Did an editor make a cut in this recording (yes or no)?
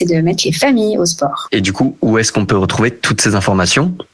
no